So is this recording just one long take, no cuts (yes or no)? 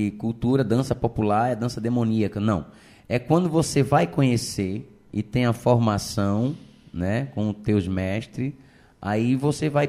yes